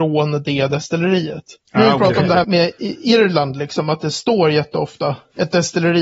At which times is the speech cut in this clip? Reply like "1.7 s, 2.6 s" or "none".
2.4 s